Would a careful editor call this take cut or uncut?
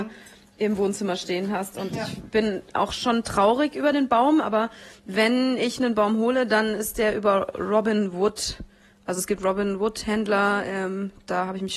uncut